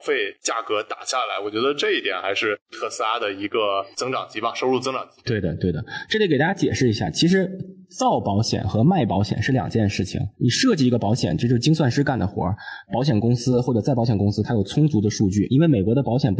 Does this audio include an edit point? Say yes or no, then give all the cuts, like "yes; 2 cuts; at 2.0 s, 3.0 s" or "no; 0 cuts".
yes; 2 cuts; at 10.3 s, 12.8 s